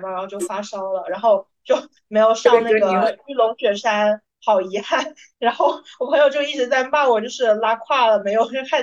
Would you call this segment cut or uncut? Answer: uncut